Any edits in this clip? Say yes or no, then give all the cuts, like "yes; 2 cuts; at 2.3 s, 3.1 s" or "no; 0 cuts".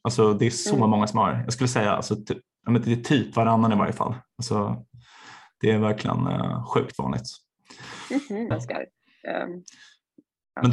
yes; 1 cut; at 8.5 s